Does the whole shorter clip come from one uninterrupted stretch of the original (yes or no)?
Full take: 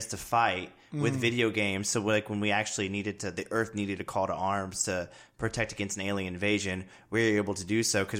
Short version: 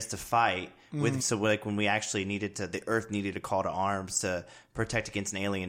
no